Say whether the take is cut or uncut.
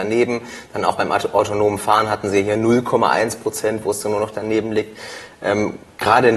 uncut